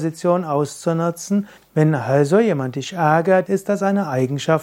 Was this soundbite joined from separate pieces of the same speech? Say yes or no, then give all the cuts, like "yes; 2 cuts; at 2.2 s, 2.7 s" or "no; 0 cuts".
yes; 2 cuts; at 1.6 s, 3.4 s